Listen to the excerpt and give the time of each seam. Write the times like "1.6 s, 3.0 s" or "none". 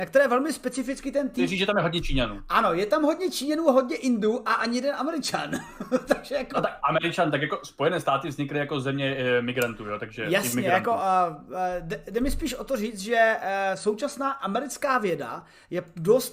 none